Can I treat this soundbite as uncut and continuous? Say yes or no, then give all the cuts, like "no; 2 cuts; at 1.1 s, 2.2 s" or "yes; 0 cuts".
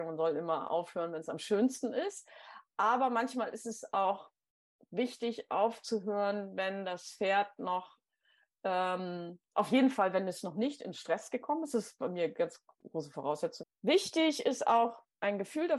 no; 1 cut; at 13.6 s